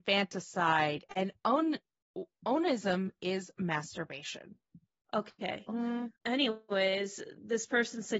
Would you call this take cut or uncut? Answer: cut